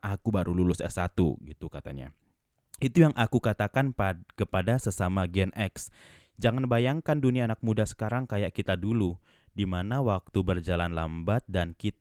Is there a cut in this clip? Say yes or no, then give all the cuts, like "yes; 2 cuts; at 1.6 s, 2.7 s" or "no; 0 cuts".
no; 0 cuts